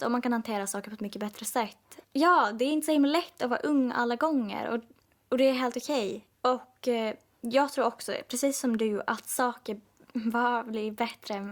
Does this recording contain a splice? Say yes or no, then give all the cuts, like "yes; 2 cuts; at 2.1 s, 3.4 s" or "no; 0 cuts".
yes; 2 cuts; at 2.0 s, 6.3 s